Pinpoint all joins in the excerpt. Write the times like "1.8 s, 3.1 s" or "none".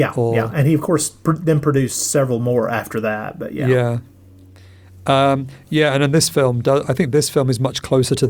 none